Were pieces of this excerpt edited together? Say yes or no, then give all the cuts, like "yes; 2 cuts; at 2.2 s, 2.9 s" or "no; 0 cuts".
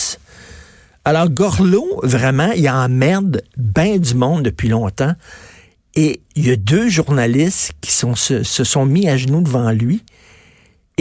no; 0 cuts